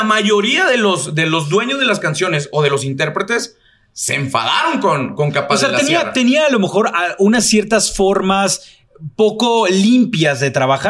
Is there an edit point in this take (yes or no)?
no